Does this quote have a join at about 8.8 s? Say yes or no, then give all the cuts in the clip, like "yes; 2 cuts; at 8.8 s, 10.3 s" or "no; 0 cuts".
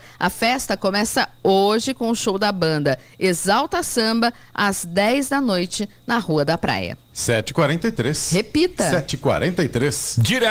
no; 1 cut; at 7.1 s